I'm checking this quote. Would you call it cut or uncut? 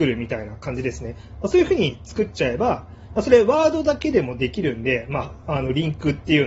uncut